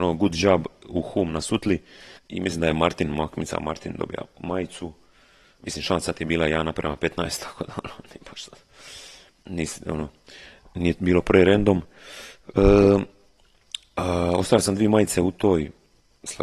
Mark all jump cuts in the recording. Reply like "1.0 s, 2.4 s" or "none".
2.2 s